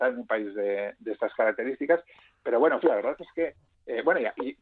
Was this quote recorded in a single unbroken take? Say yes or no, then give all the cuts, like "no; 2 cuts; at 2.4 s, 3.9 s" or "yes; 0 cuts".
no; 1 cut; at 2.8 s